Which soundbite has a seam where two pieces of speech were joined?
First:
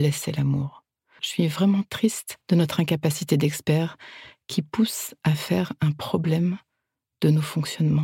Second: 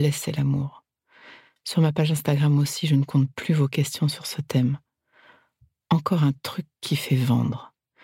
first; 2 cuts; at 1.2 s, 2.4 s

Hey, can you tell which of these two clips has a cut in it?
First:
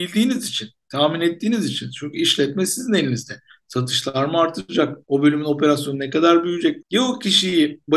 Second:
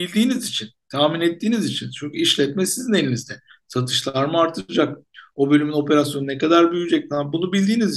first; 2 cuts; at 5.0 s, 6.8 s

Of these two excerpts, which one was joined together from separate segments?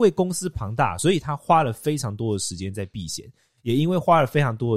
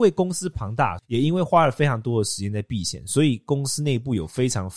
second; 1 cut; at 1.0 s

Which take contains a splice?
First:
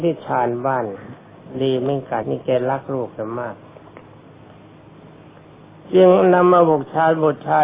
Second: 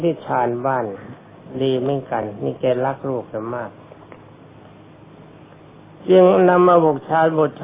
first; 1 cut; at 2.2 s

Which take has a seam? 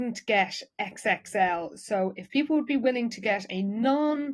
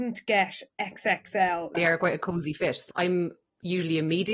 second; 2 cuts; at 1.7 s, 2.9 s

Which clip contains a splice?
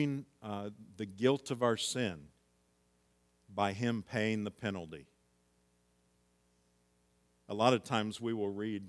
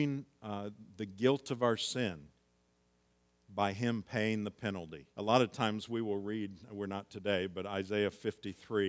second; 1 cut; at 5.1 s

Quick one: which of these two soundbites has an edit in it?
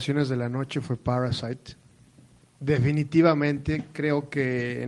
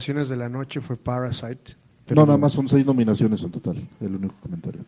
second; 1 cut; at 2.1 s

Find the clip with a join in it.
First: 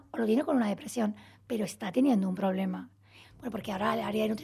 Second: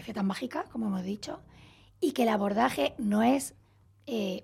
first; 1 cut; at 3.2 s

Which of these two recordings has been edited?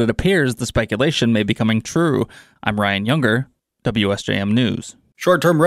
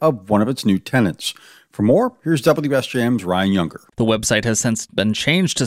second; 1 cut; at 3.9 s

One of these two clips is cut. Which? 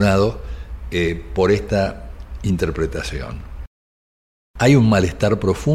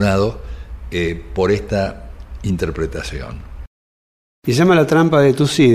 second; 1 cut; at 4.4 s

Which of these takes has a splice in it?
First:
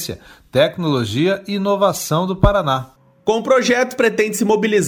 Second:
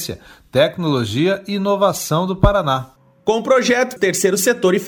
second; 1 cut; at 4.0 s

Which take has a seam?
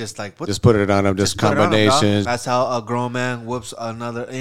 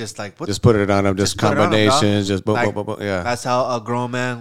first; 1 cut; at 2.2 s

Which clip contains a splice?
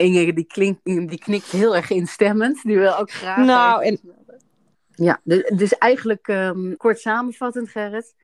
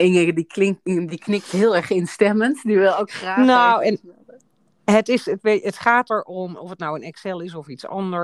first; 2 cuts; at 4.7 s, 6.8 s

